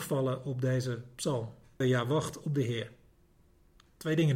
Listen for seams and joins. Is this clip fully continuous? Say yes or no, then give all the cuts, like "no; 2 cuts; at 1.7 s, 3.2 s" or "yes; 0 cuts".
no; 1 cut; at 1.8 s